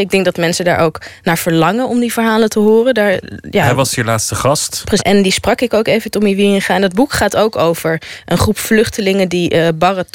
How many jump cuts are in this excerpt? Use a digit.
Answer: 1